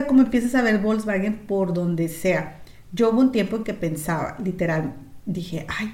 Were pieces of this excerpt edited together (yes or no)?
no